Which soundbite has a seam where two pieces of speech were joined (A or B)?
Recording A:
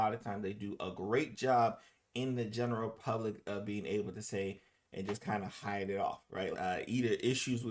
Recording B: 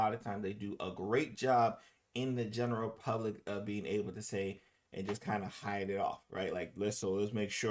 A